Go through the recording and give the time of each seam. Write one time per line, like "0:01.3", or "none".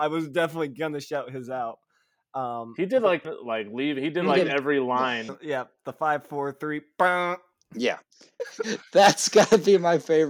0:03.2
0:05.3
0:08.4

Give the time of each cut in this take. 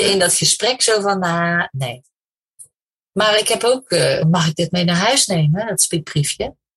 0:04.2

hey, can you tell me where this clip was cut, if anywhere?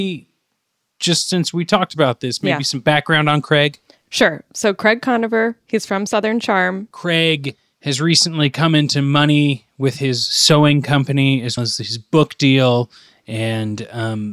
0:06.9
0:11.6

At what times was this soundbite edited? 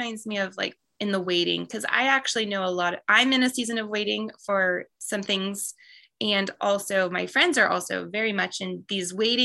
none

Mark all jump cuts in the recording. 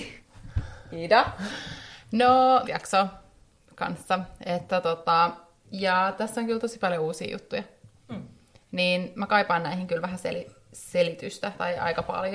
0:02.6
0:05.6

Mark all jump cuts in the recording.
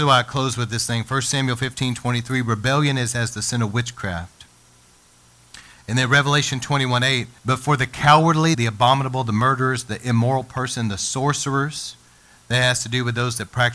0:07.4
0:08.5

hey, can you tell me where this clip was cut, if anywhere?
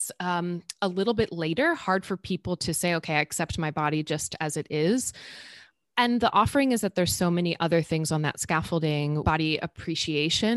0:09.2

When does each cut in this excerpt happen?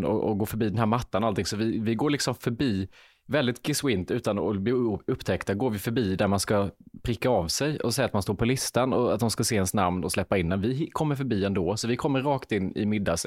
none

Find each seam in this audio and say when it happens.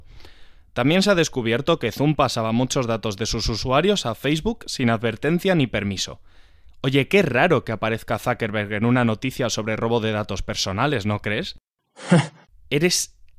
0:12.5

